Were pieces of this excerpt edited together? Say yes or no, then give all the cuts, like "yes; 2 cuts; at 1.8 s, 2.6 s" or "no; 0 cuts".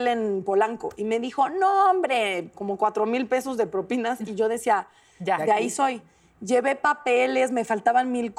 yes; 1 cut; at 2.5 s